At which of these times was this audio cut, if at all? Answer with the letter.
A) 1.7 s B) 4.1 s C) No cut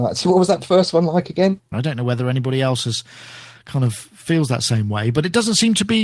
A